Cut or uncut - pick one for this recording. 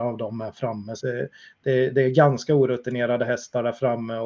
cut